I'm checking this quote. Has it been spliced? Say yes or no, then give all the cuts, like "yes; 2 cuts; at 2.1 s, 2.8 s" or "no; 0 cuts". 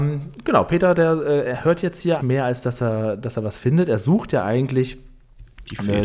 yes; 1 cut; at 2.2 s